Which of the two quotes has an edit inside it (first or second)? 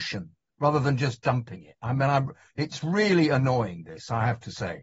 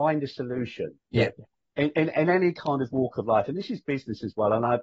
second